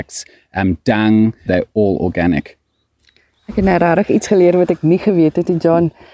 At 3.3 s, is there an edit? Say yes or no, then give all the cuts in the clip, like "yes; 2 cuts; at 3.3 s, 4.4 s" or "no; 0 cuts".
no; 1 cut; at 1.5 s